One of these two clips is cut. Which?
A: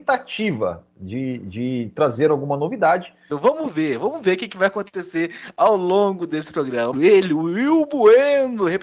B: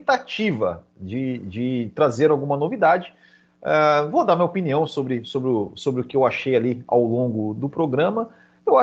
A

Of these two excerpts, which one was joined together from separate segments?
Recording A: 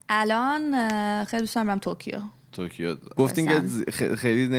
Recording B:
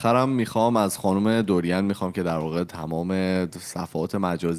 A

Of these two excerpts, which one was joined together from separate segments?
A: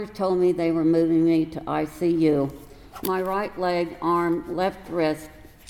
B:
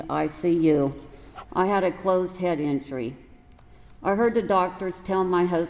B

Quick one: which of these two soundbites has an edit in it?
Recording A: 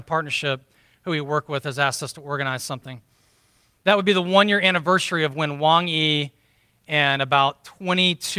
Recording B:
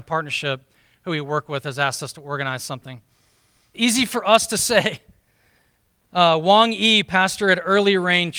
B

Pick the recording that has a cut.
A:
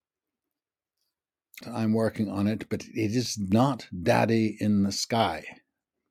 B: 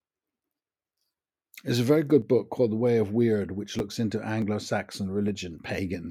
A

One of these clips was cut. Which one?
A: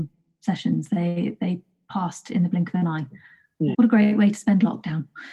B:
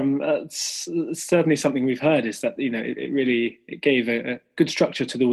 A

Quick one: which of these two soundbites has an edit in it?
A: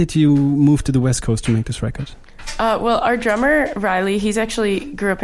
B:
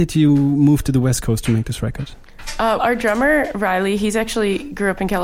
B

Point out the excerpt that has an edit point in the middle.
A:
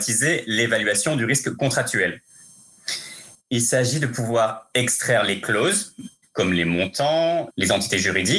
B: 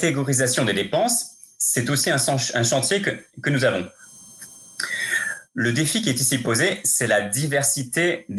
A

